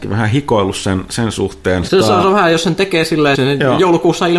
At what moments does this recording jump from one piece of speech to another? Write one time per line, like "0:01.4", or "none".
0:01.9
0:03.3